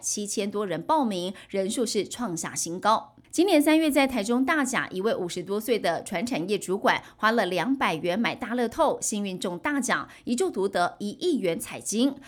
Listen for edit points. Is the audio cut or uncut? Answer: cut